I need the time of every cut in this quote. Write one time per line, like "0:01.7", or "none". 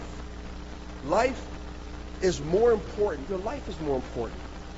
0:03.2